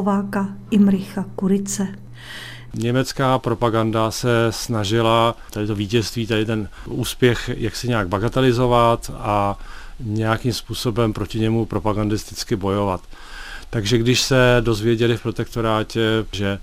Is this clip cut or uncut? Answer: cut